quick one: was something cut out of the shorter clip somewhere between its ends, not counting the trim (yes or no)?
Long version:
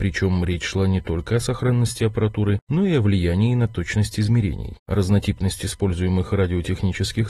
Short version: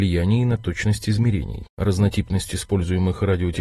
no